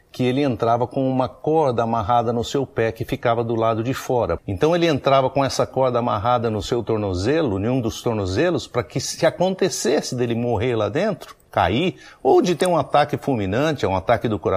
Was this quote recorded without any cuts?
no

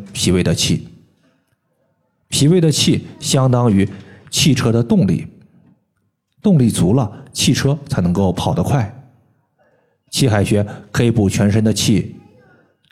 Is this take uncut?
yes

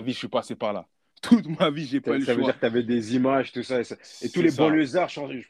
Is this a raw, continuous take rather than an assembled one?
yes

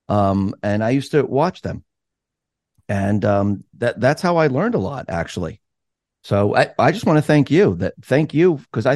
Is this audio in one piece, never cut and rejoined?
yes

